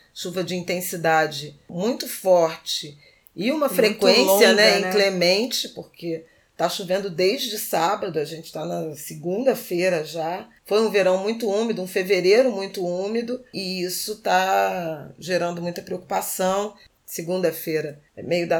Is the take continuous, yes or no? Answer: yes